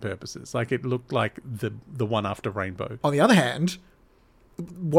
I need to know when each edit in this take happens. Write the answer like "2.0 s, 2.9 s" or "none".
3.0 s